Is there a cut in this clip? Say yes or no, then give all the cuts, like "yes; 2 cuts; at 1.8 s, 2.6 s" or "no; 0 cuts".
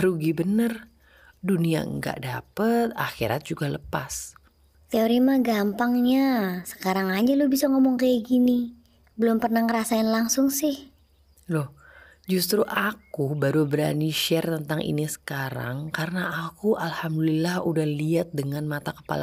no; 0 cuts